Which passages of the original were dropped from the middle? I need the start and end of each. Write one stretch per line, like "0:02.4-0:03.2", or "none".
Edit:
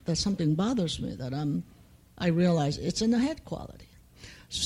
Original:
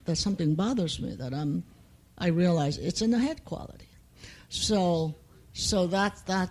none